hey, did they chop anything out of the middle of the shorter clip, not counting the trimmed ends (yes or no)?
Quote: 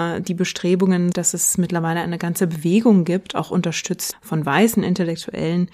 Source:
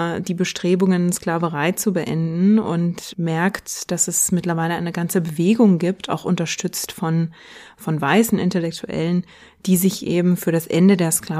yes